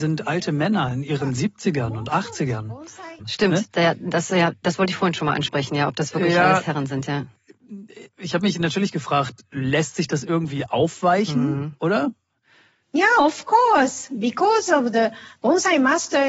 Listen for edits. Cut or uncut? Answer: cut